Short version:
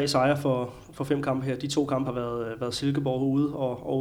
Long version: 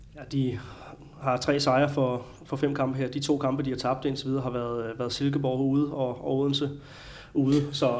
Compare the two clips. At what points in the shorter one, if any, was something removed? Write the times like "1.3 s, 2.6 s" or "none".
2.0 s